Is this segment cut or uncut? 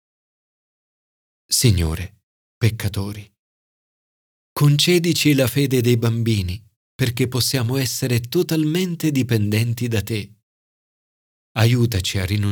cut